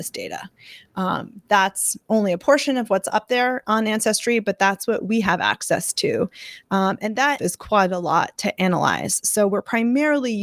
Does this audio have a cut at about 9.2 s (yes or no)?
no